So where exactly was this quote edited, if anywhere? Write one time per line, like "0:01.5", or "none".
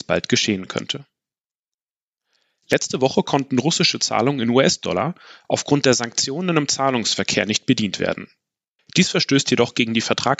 0:08.8